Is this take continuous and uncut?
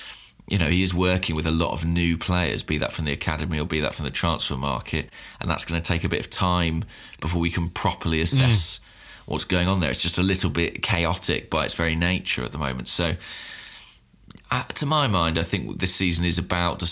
yes; 0 cuts

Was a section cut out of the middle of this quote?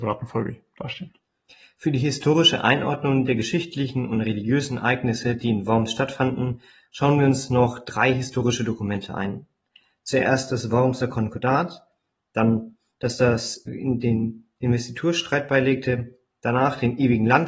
yes; 1 cut; at 13.7 s

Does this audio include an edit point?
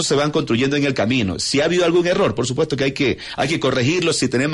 no; 0 cuts

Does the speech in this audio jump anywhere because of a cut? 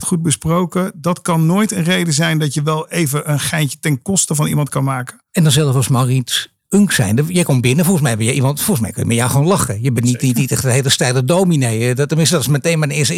no; 0 cuts

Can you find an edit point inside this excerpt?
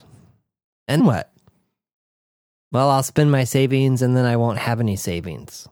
yes; 1 cut; at 1.0 s

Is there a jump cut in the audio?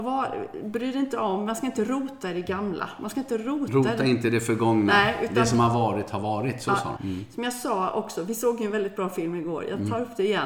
yes; 1 cut; at 7.0 s

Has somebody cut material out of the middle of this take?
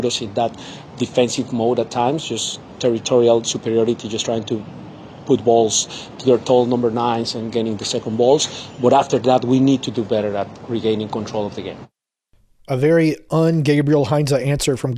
no; 0 cuts

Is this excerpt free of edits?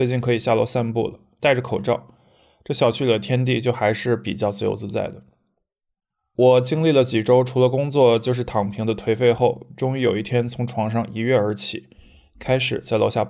no; 1 cut; at 1.4 s

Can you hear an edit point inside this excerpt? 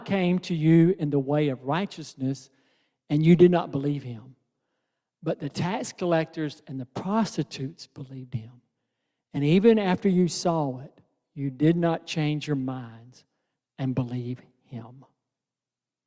no; 0 cuts

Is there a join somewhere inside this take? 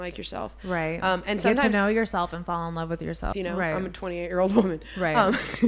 yes; 1 cut; at 3.3 s

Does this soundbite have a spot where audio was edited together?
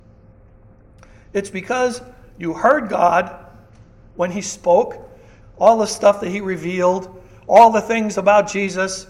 yes; 1 cut; at 5.4 s

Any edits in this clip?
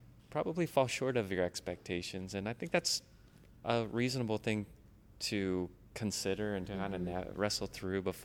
no; 0 cuts

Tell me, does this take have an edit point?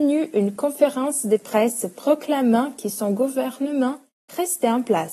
no; 0 cuts

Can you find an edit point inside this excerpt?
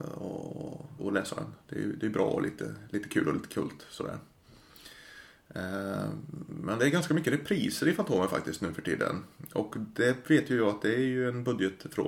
yes; 1 cut; at 1.0 s

